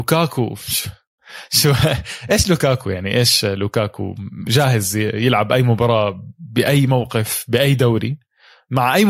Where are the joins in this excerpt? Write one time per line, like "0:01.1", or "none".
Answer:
none